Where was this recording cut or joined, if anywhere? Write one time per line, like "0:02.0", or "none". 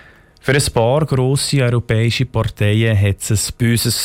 none